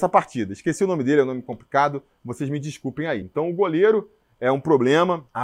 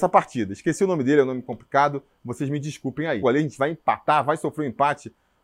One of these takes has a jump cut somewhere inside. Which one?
second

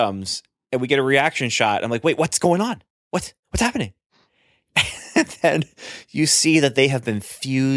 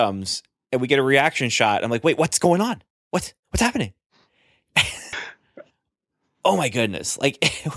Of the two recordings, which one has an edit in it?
second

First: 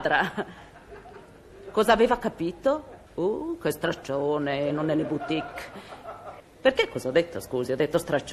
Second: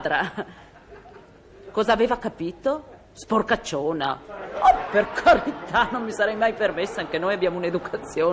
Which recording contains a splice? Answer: first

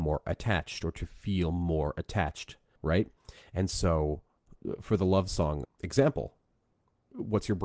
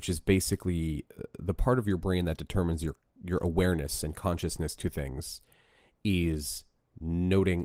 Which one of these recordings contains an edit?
first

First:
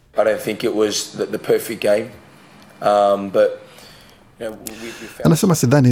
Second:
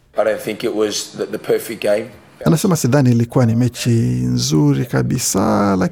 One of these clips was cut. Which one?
second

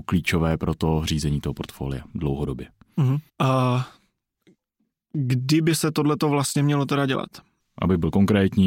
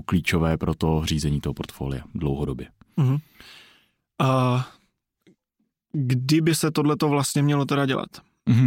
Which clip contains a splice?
first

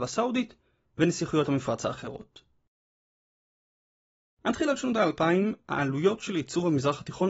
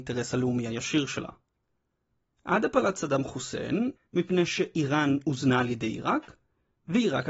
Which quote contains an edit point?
second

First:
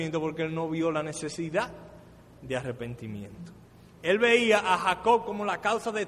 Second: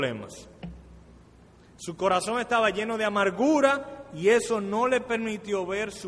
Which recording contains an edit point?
first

